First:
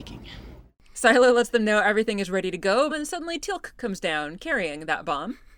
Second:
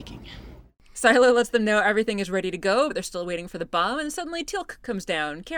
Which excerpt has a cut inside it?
first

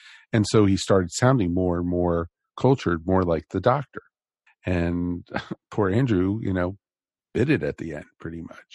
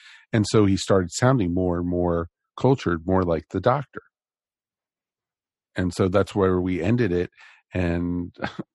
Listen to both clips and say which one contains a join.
first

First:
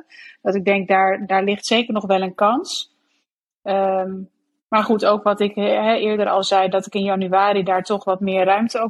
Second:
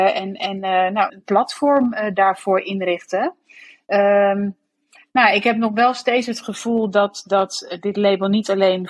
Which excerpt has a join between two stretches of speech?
second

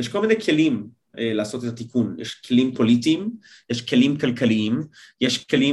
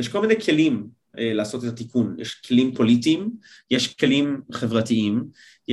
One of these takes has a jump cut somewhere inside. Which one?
second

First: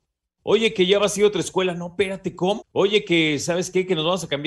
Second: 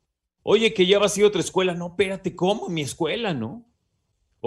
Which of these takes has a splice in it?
first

